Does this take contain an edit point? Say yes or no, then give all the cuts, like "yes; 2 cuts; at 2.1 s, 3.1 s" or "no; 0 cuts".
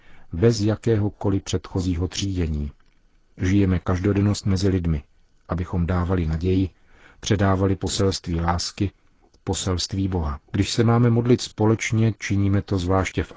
yes; 1 cut; at 10.5 s